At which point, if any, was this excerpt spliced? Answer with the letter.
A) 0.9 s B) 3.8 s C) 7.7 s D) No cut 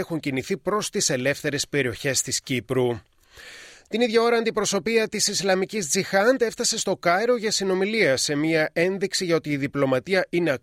B